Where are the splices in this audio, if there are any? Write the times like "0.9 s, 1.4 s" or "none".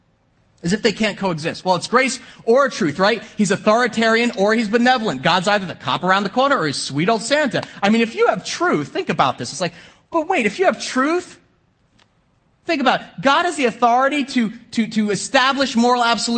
none